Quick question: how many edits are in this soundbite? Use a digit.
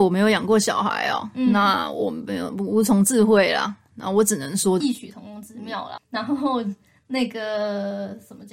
2